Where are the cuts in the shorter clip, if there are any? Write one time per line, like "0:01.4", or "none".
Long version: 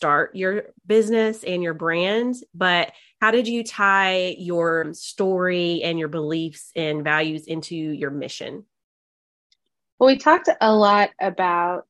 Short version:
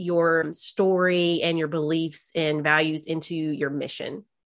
none